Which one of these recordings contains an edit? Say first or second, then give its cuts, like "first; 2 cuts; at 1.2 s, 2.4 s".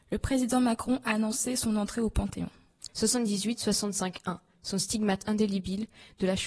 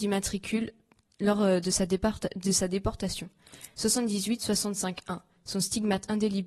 first; 1 cut; at 2.9 s